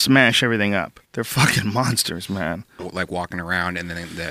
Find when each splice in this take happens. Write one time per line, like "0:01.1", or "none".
0:01.0
0:02.8